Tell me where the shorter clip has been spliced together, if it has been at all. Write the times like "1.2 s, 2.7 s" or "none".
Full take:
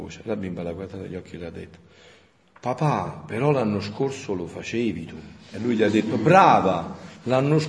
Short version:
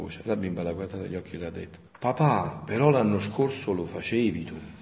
1.9 s